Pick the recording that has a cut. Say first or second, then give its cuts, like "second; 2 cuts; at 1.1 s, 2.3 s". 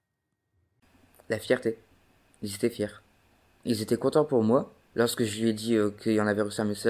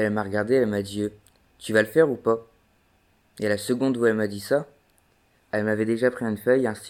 first; 1 cut; at 4.9 s